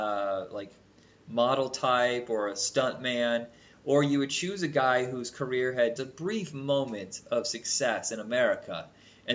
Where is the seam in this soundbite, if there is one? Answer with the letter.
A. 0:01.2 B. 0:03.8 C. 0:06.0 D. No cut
C